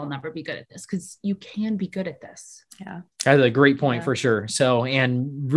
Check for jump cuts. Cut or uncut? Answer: uncut